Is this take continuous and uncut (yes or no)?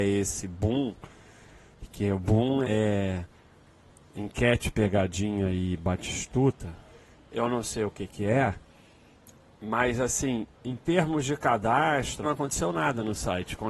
no